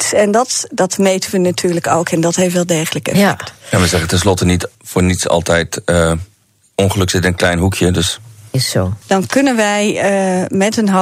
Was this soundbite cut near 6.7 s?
no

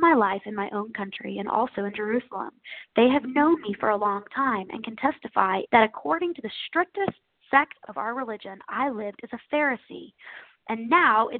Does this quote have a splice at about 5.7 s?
yes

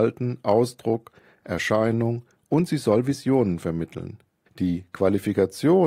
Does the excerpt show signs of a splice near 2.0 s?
no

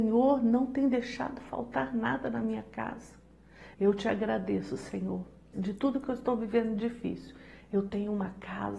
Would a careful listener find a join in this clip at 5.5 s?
yes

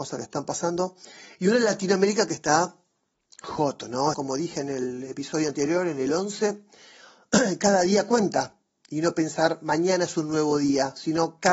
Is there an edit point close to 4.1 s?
yes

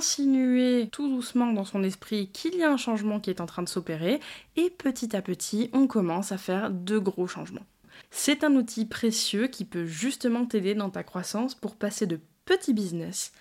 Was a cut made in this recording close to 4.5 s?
no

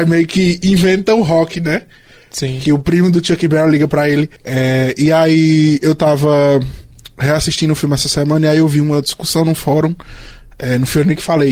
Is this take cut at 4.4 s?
yes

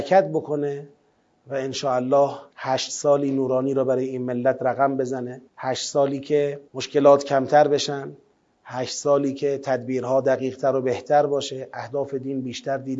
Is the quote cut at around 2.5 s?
yes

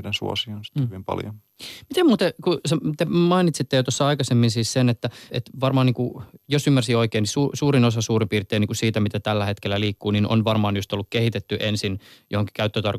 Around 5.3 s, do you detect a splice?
yes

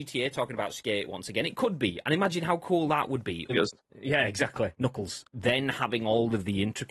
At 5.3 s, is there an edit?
yes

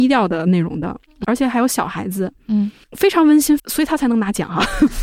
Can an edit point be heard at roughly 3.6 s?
yes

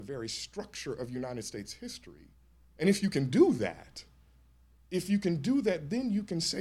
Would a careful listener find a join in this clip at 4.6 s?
no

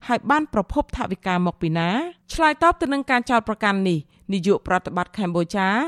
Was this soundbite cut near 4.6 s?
no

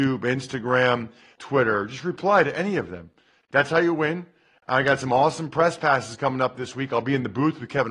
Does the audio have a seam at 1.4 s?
yes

